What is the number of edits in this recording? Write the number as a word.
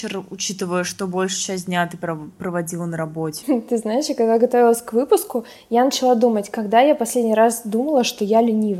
one